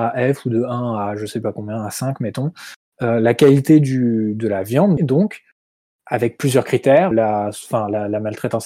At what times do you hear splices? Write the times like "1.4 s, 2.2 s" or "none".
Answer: 5.0 s, 7.1 s